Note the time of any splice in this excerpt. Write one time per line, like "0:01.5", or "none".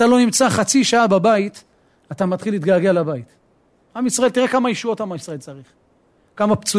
0:03.9